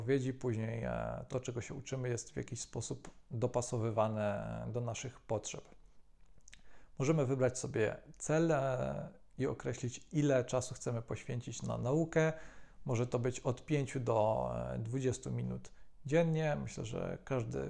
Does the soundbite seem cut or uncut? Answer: uncut